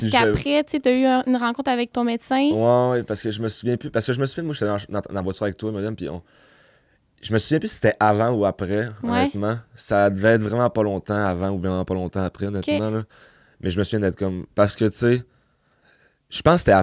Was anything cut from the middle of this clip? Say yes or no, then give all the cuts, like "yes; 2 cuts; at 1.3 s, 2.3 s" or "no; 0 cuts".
yes; 1 cut; at 1.9 s